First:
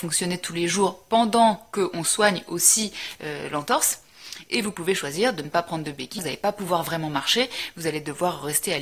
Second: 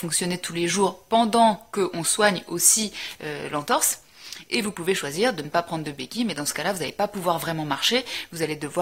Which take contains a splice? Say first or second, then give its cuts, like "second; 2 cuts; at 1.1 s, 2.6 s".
first; 1 cut; at 6.2 s